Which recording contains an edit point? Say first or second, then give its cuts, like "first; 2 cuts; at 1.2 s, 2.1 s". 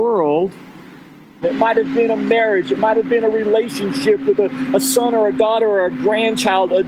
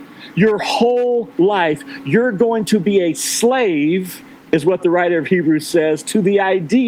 first; 1 cut; at 1.4 s